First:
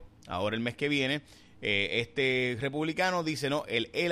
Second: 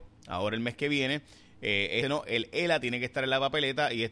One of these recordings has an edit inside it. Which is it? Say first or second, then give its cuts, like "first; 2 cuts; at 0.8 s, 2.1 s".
second; 1 cut; at 2.0 s